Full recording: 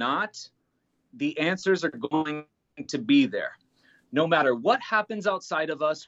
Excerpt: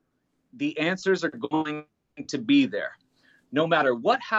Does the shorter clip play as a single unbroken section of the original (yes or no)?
yes